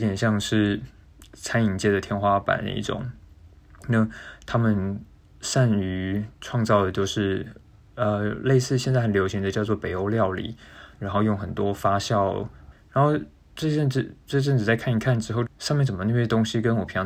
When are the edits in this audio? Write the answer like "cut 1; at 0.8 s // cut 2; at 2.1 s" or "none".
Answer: cut 1; at 10.9 s // cut 2; at 12.7 s // cut 3; at 15.5 s